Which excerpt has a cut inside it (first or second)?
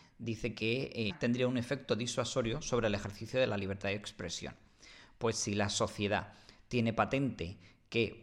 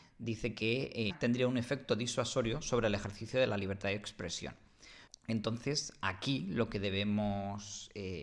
second